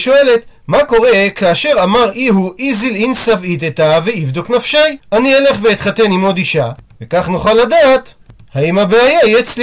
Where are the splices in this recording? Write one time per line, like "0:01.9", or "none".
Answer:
0:05.0